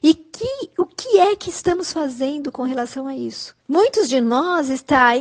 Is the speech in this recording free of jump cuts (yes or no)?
no